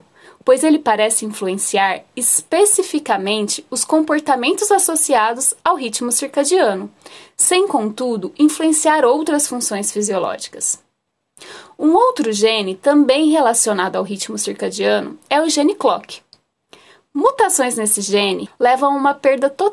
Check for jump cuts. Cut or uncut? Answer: cut